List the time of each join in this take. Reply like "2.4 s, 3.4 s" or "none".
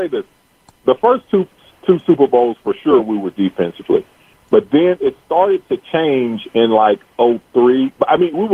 none